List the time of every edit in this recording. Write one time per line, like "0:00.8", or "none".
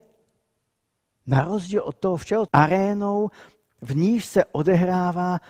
0:02.5